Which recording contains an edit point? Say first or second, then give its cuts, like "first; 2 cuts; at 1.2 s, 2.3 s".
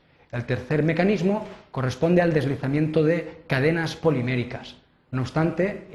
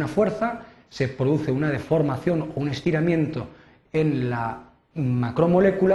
first; 1 cut; at 5.1 s